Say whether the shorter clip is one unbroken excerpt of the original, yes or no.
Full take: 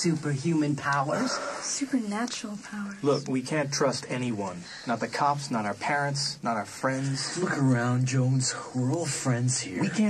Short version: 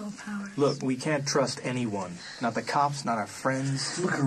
no